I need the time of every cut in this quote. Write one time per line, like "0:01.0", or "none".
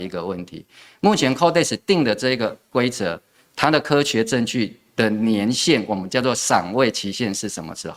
none